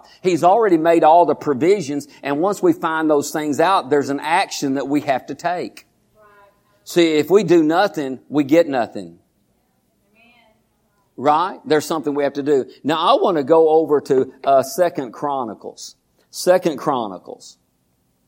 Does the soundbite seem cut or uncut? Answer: uncut